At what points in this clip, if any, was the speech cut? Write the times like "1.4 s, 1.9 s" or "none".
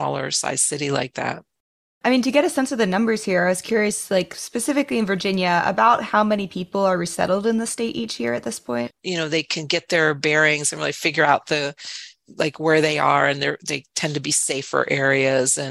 9.0 s